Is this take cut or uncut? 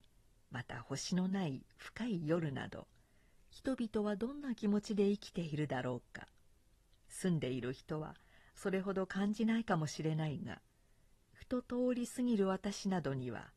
uncut